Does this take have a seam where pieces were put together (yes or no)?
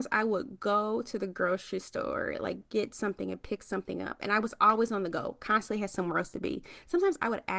no